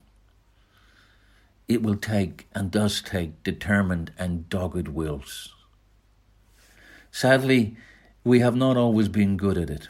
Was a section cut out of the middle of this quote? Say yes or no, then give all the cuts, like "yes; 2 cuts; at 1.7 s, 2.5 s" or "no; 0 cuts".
no; 0 cuts